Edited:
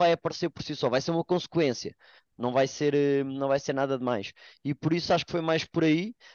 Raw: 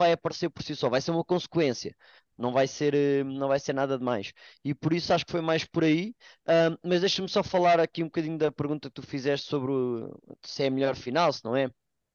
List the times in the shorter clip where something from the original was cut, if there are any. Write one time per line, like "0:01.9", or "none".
none